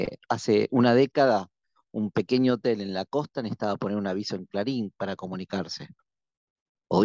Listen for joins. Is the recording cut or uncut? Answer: uncut